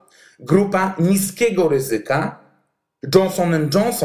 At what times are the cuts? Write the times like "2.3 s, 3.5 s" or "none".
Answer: 3.0 s